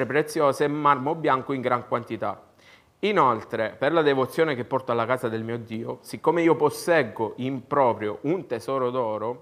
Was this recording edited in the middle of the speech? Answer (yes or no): no